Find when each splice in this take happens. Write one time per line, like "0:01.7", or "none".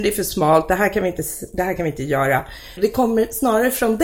0:02.8